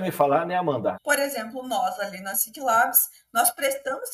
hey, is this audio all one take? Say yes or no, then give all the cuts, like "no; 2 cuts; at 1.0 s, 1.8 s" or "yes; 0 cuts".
no; 1 cut; at 0.9 s